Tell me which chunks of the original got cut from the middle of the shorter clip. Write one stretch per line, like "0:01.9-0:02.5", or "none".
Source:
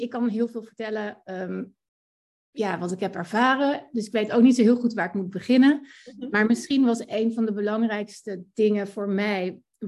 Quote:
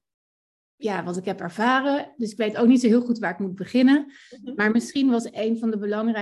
none